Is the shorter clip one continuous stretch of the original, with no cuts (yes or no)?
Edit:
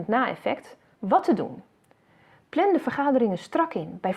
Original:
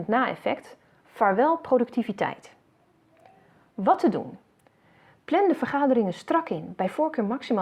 no